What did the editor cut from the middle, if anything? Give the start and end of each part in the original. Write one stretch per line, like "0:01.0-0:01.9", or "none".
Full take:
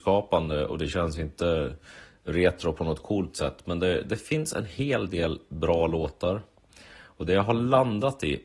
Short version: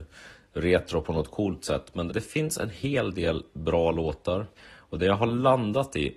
0:03.8-0:04.0
0:06.5-0:06.8